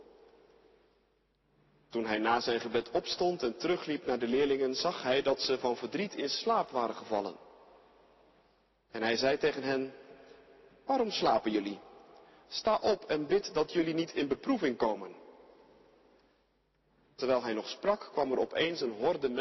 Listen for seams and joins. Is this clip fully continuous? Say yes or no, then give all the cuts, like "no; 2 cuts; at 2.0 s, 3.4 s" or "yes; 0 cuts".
yes; 0 cuts